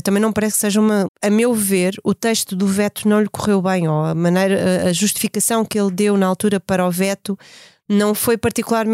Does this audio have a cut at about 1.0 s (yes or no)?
yes